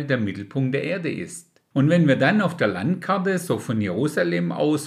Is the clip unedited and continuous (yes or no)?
yes